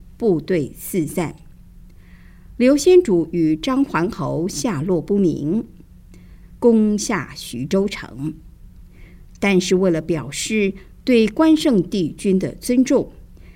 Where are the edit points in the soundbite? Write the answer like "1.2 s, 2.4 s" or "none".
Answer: 6.6 s